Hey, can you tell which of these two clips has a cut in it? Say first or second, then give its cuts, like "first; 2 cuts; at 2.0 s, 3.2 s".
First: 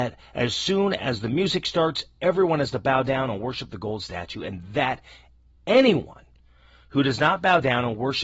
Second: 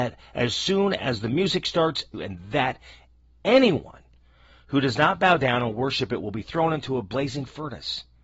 second; 1 cut; at 2.1 s